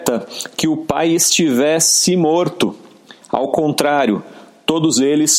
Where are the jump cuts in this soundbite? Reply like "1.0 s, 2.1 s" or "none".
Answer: 3.2 s